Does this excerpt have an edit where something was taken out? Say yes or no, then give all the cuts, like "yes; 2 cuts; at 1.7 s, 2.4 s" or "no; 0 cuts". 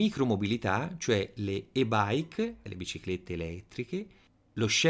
no; 0 cuts